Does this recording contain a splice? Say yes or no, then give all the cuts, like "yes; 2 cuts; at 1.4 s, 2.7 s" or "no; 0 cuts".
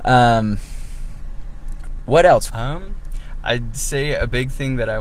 yes; 1 cut; at 2.5 s